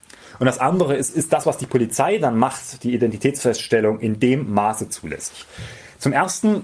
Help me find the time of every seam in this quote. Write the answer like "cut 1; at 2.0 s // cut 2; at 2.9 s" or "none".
none

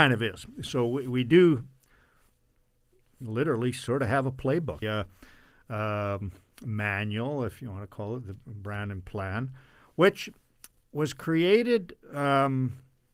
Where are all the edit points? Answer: cut 1; at 4.8 s

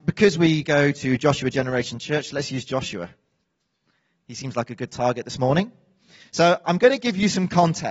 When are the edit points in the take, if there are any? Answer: none

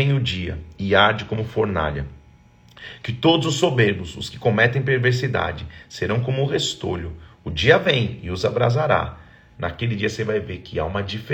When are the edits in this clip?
cut 1; at 9.5 s

